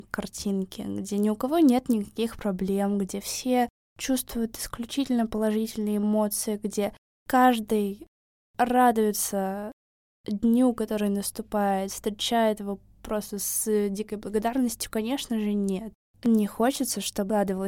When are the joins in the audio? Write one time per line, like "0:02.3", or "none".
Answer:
none